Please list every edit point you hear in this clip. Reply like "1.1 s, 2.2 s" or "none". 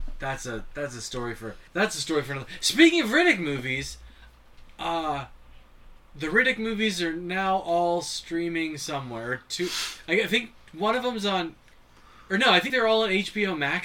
1.7 s, 12.7 s